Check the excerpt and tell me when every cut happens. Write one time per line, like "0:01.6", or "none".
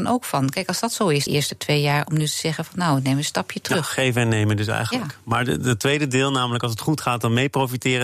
0:01.3